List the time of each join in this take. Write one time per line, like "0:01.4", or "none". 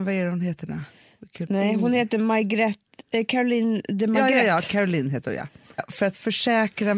0:01.5
0:05.8

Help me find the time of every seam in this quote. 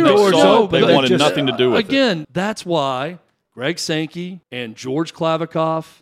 0:02.2
0:04.4

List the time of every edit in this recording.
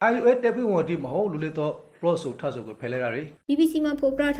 0:03.4

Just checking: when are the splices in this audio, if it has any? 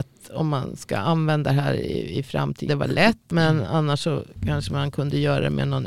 0:02.7

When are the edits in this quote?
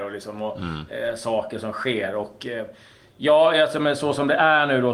none

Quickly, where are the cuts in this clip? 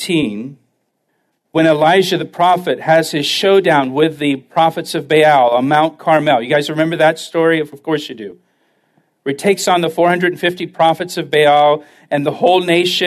none

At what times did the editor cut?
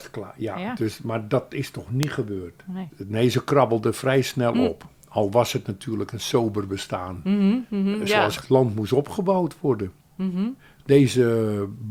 0:08.4

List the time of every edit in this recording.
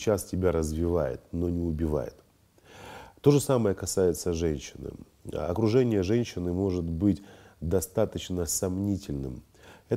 none

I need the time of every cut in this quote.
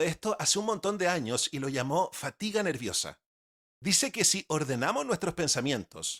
0:03.7

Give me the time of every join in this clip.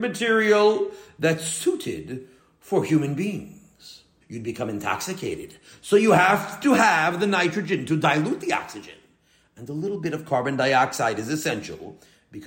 0:04.2

